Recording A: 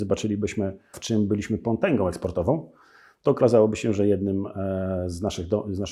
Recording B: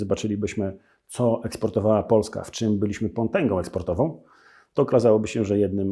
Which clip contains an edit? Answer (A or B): A